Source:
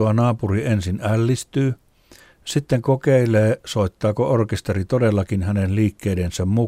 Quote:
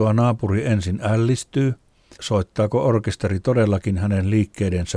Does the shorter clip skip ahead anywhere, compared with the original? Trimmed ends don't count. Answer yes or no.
yes